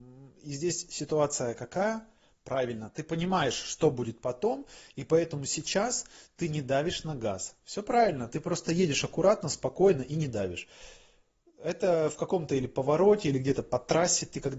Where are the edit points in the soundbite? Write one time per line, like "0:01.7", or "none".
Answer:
none